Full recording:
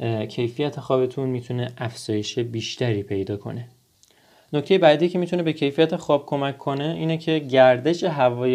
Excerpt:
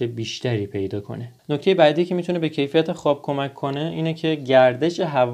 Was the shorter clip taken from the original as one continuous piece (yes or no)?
no